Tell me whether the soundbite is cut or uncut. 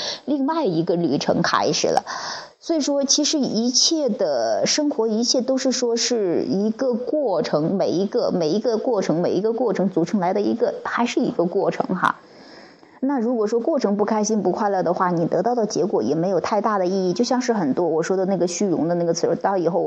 uncut